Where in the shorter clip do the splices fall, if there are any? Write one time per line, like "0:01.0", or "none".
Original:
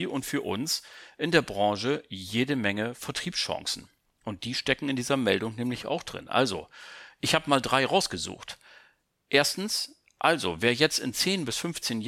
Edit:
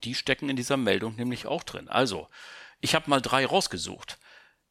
none